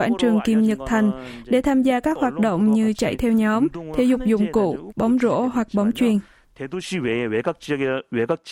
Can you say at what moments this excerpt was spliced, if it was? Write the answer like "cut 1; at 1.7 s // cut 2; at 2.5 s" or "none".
cut 1; at 4.9 s